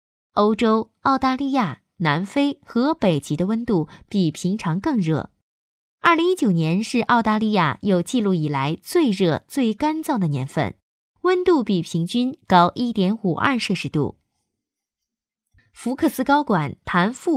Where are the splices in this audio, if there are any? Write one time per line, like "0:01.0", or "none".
none